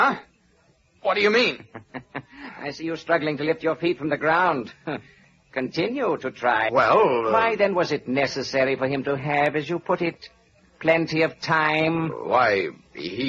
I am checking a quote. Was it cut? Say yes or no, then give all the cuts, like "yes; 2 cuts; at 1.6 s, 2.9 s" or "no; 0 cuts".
yes; 1 cut; at 6.7 s